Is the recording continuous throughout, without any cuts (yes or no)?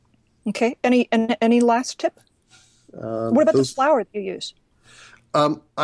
yes